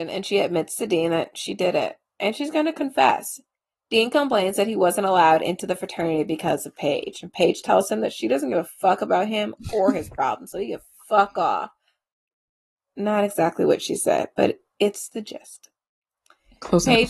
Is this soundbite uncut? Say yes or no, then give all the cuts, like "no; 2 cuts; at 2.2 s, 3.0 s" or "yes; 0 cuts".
yes; 0 cuts